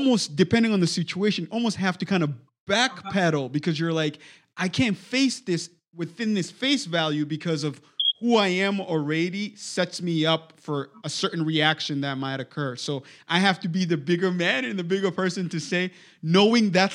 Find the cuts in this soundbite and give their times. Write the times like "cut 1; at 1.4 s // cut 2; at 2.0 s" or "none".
none